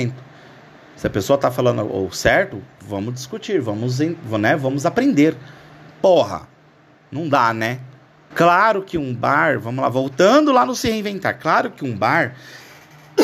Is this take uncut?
no; 2 cuts; at 5.9 s, 8.3 s

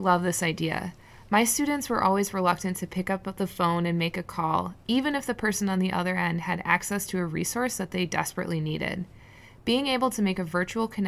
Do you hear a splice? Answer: no; 0 cuts

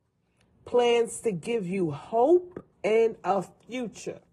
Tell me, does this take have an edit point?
yes; 1 cut; at 2.7 s

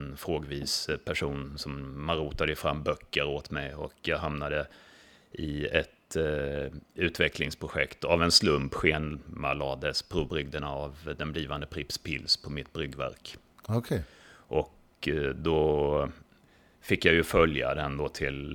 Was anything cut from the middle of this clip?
no; 0 cuts

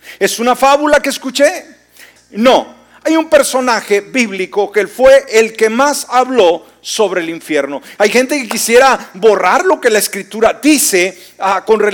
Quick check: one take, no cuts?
no; 2 cuts; at 2.2 s, 8.0 s

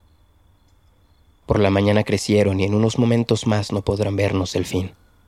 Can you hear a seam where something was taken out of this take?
yes; 1 cut; at 1.4 s

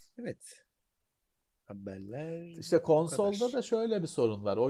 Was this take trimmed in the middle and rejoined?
no; 0 cuts

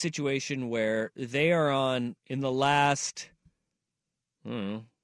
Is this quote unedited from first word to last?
no; 1 cut; at 2.2 s

